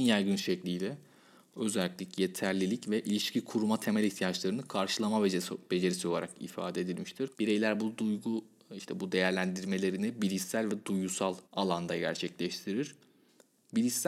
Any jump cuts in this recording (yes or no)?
yes